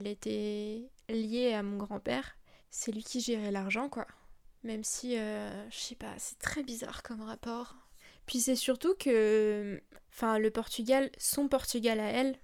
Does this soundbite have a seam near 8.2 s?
no; 0 cuts

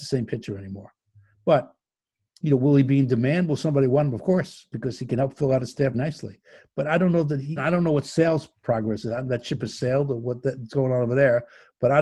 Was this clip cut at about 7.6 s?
yes; 2 cuts; at 5.9 s, 7.6 s

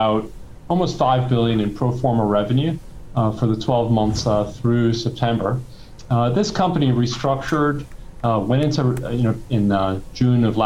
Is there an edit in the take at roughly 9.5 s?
yes; 1 cut; at 9.5 s

